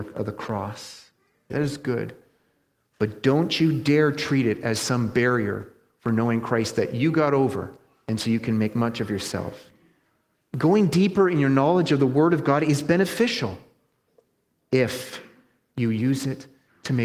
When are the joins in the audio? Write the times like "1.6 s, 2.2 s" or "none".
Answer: 1.5 s